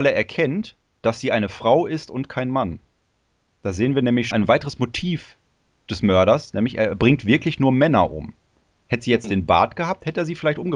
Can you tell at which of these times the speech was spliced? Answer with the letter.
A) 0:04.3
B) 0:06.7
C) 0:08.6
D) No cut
A